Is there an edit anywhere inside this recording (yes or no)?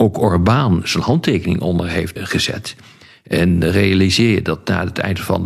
yes